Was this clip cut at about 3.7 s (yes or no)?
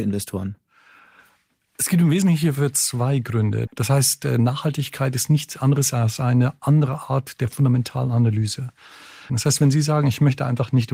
yes